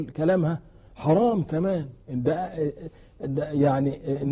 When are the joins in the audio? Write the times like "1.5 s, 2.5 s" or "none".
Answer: 3.2 s